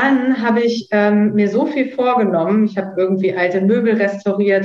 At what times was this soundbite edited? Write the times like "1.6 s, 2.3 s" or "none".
none